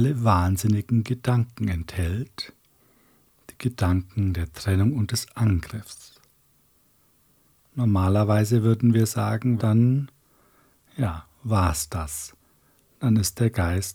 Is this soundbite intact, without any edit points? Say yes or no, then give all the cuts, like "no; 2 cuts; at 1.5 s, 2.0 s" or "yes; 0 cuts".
no; 1 cut; at 9.6 s